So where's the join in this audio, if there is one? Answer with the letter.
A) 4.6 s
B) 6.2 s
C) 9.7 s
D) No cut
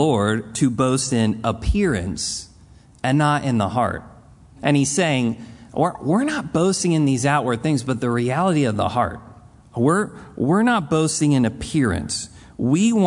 A